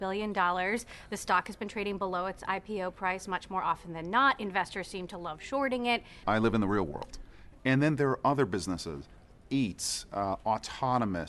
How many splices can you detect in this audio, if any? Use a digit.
2